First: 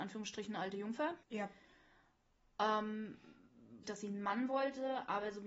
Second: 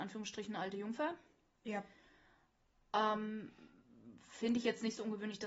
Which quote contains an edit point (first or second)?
first